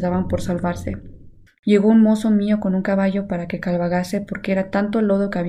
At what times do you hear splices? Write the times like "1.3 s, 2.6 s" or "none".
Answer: 1.5 s